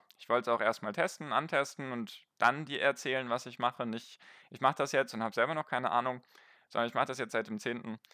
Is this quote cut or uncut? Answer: uncut